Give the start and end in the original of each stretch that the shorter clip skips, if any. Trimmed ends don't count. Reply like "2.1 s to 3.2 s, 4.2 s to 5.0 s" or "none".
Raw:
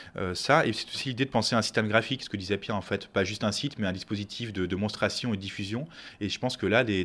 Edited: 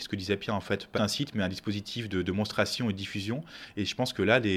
3.2 s to 3.4 s